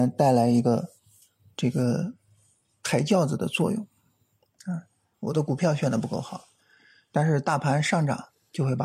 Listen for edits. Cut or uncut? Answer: cut